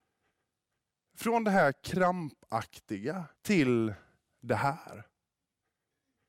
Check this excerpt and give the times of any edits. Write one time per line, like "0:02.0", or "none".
0:03.4